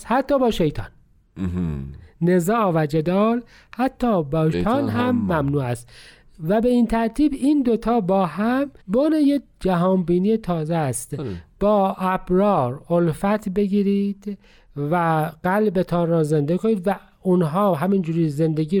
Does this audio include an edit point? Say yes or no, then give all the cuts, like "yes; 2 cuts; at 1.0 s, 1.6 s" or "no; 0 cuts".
yes; 2 cuts; at 4.5 s, 8.8 s